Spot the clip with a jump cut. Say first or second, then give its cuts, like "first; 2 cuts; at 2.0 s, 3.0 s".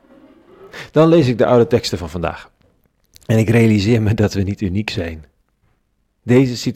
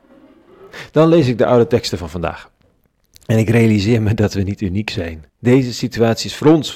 second; 1 cut; at 5.3 s